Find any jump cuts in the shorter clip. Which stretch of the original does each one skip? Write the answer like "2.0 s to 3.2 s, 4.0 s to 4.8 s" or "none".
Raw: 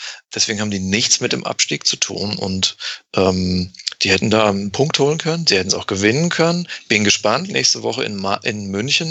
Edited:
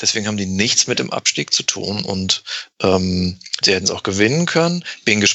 3.9 s to 5.4 s